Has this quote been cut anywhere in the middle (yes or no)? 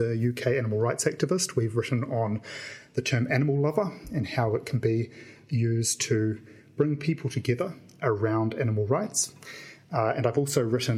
no